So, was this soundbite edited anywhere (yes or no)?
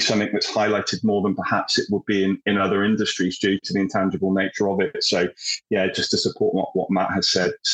no